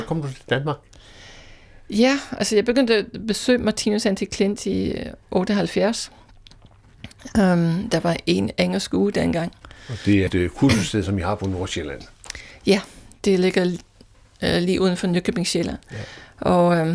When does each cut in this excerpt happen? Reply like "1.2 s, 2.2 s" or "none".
10.3 s